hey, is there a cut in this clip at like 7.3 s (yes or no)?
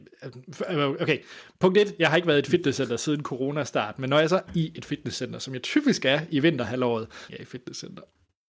yes